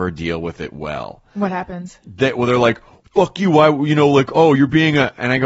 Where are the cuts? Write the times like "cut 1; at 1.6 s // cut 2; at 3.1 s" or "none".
none